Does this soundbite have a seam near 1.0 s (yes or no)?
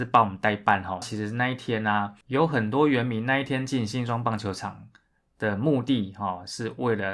yes